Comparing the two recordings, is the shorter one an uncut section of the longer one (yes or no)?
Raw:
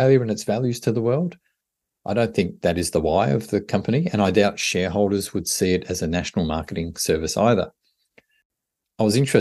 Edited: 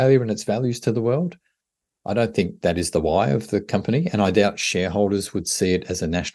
yes